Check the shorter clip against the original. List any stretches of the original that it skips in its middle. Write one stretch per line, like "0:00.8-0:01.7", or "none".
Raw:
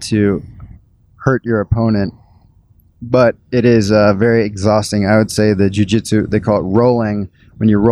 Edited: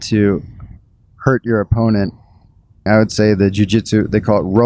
0:02.9-0:05.1